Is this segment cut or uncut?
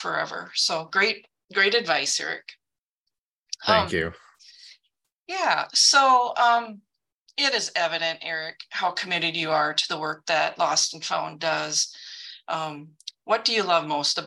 uncut